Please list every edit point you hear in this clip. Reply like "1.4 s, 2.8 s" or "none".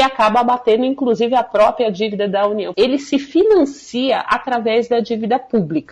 2.7 s